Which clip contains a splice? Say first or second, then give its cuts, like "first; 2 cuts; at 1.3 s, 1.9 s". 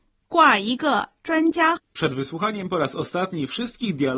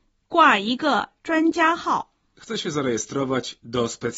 first; 1 cut; at 1.8 s